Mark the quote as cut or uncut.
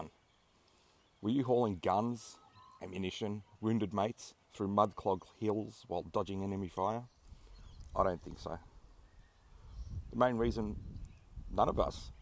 cut